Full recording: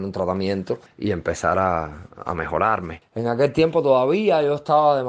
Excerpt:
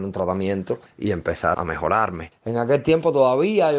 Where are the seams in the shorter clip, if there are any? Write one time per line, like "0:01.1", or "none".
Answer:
0:01.5